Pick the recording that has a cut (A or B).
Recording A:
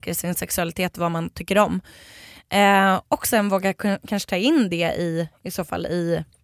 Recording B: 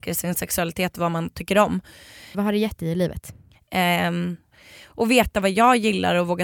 B